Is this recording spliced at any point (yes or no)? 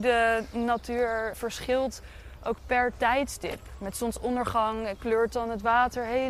yes